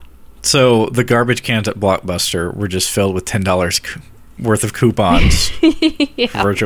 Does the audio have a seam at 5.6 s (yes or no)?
no